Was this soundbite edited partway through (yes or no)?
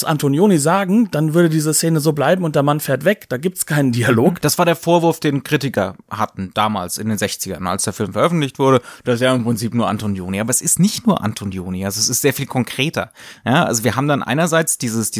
no